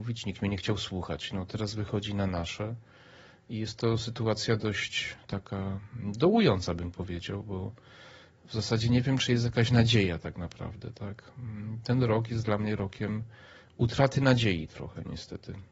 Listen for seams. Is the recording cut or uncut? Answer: uncut